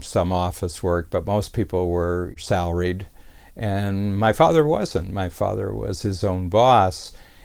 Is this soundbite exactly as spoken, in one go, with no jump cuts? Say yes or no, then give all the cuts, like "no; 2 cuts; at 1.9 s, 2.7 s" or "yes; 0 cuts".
yes; 0 cuts